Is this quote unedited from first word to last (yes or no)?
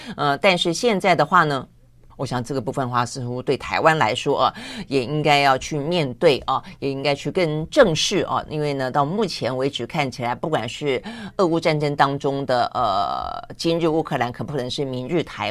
no